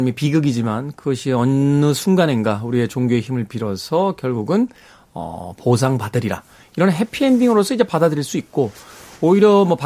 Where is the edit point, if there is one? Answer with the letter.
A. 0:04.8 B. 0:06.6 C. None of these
C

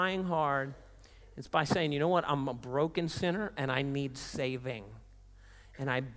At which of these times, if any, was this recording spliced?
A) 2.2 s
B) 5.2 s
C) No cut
C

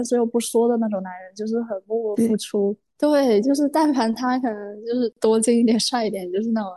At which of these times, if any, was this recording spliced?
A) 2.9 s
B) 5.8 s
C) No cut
A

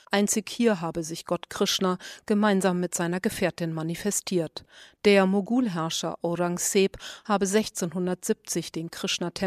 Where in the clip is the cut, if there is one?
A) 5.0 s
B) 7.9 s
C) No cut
A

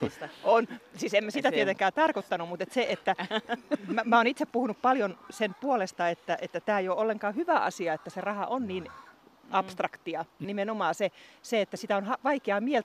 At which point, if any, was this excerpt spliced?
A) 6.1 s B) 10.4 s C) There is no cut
B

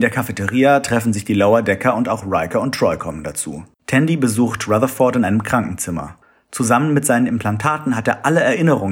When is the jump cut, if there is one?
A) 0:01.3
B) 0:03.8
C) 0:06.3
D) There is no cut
B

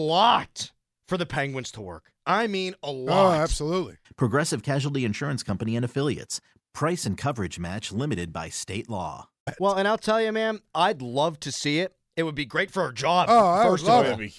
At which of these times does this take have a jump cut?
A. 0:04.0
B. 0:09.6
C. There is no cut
A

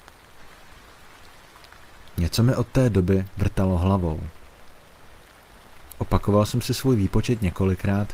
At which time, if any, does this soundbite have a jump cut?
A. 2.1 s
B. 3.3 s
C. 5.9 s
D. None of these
B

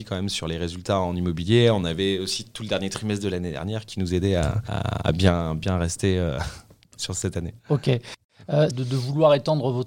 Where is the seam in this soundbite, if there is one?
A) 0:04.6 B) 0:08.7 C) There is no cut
B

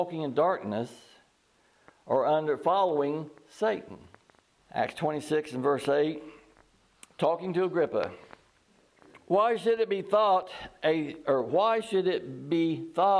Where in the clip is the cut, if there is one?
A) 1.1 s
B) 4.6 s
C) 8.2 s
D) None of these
B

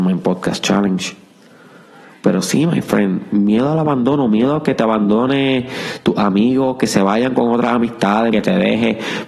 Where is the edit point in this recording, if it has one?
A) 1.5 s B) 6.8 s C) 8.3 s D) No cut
C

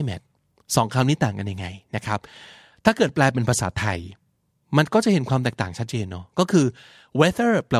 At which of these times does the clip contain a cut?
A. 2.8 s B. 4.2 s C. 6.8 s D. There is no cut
D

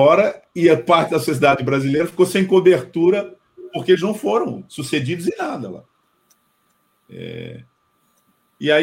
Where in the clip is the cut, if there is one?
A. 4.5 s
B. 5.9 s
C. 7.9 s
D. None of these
D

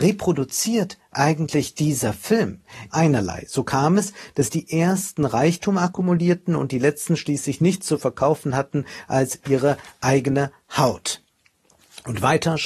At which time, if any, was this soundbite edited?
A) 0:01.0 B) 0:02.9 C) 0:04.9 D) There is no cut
B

